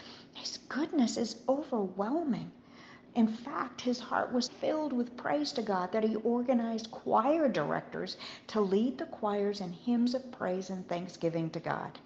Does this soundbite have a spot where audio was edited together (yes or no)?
yes